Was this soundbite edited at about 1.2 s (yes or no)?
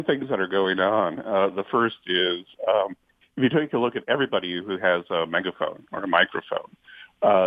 no